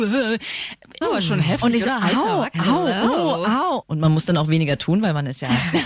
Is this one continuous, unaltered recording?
no; 2 cuts; at 1.0 s, 3.8 s

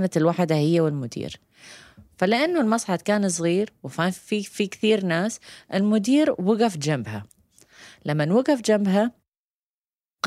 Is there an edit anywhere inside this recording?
no; 0 cuts

